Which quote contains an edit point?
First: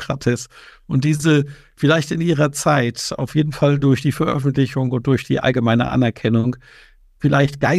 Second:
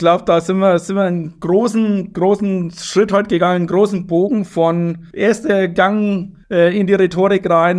second; 2 cuts; at 5.1 s, 6.4 s

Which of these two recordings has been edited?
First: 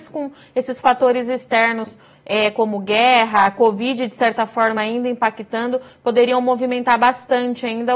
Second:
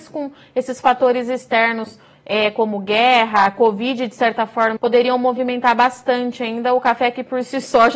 second; 1 cut; at 4.8 s

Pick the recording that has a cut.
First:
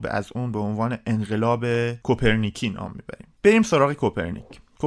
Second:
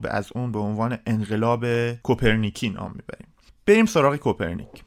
first; 1 cut; at 3.4 s

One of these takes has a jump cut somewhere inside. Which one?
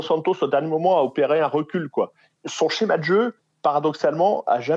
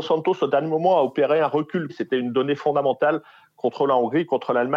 second; 1 cut; at 1.9 s

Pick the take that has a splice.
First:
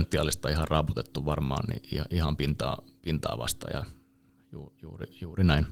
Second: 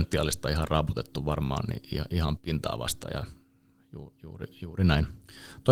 second; 1 cut; at 2.4 s

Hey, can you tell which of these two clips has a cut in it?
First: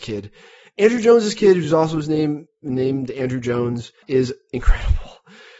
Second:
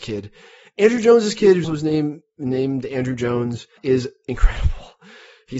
second; 1 cut; at 1.6 s

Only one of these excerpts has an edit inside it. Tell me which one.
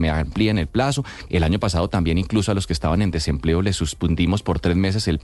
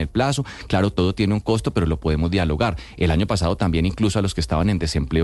first; 1 cut; at 1.3 s

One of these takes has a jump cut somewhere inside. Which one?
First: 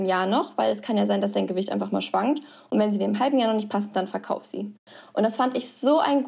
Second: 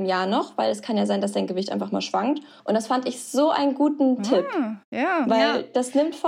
second; 1 cut; at 2.6 s

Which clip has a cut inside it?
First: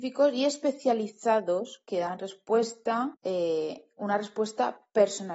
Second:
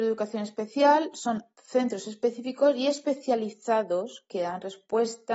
first; 1 cut; at 3.1 s

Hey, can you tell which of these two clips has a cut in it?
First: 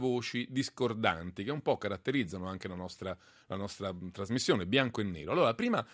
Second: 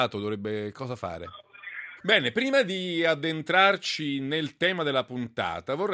second; 1 cut; at 2.0 s

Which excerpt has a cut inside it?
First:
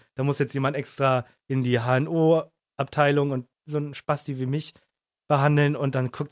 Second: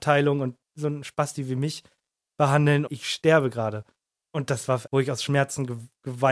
second; 2 cuts; at 2.9 s, 4.9 s

